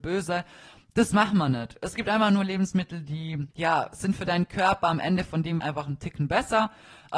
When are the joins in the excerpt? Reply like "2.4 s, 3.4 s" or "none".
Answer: 3.5 s, 5.6 s